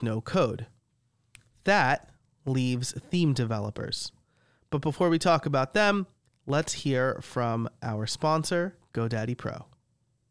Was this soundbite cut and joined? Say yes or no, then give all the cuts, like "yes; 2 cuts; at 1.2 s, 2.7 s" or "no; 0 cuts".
no; 0 cuts